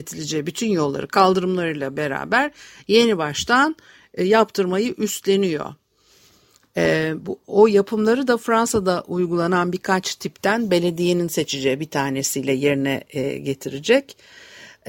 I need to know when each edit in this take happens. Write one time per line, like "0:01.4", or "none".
none